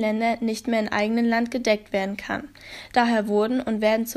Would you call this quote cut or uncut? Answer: uncut